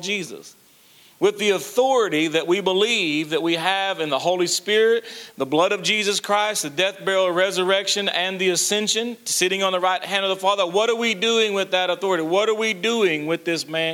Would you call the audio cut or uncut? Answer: uncut